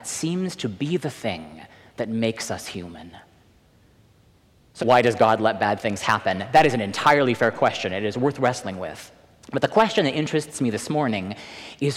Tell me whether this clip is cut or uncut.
cut